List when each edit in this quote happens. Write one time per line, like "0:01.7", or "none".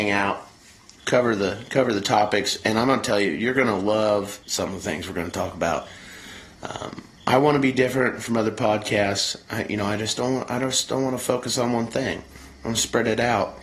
0:01.0
0:04.4